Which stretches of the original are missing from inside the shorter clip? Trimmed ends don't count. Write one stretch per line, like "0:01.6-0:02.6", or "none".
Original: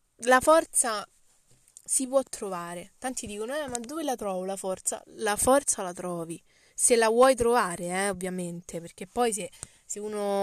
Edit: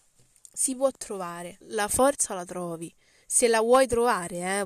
0:02.9-0:05.1